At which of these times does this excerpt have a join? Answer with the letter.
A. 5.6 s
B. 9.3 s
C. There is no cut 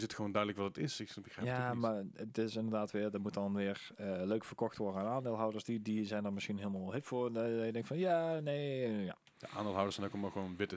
C